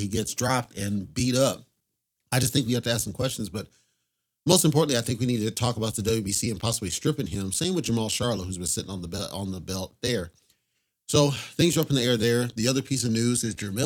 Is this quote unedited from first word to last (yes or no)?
yes